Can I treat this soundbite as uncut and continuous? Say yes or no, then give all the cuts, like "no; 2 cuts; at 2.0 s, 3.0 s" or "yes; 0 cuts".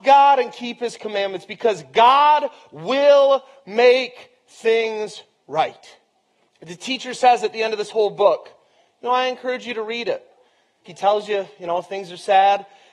no; 2 cuts; at 6.5 s, 10.9 s